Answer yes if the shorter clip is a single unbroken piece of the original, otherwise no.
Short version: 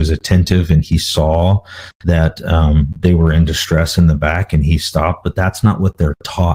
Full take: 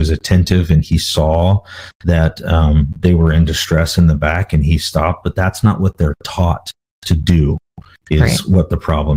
yes